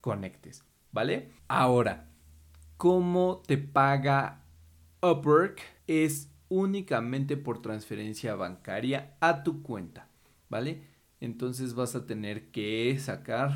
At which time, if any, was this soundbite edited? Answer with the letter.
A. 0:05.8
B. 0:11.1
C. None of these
A